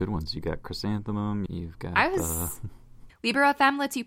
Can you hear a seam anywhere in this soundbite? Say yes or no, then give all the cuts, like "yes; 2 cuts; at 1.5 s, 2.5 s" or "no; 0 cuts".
yes; 2 cuts; at 1.5 s, 3.1 s